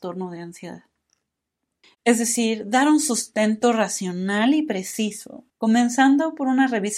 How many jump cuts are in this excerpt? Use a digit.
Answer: 2